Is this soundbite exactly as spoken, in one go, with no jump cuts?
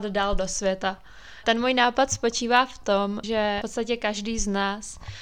no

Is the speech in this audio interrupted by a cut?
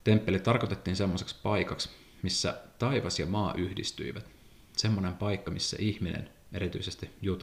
no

